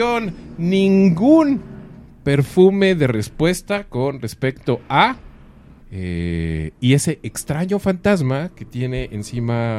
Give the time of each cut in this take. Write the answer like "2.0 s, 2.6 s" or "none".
5.8 s

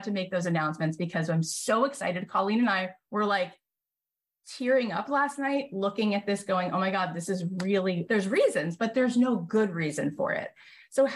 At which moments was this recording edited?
8.1 s

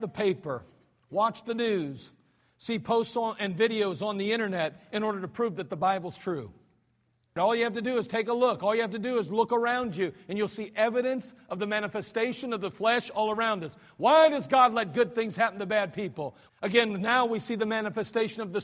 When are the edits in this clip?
7.4 s, 16.5 s

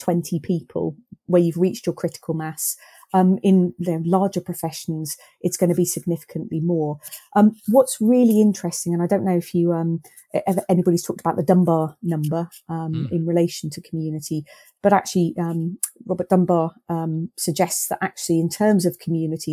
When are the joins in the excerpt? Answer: none

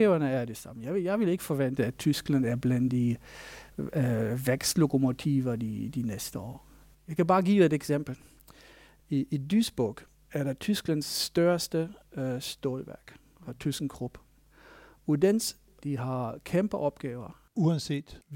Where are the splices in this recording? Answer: 15.8 s

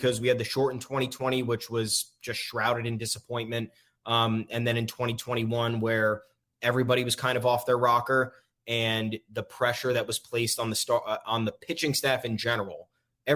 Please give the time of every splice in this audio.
none

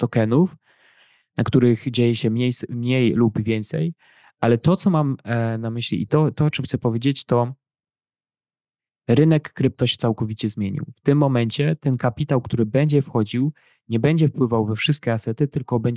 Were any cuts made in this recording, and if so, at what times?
none

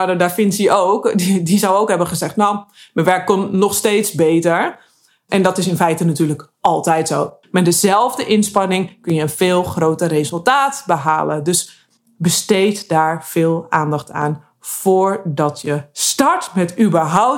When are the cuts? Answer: 7.4 s

